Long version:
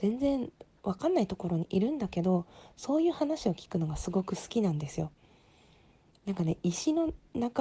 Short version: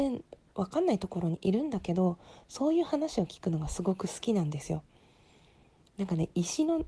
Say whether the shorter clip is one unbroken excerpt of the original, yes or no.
yes